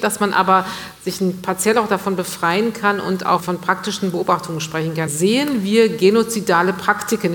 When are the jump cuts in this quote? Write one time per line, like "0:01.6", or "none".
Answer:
0:03.4
0:05.1